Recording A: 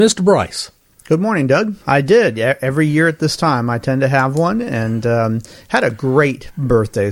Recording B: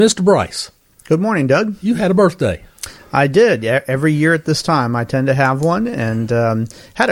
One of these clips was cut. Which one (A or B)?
A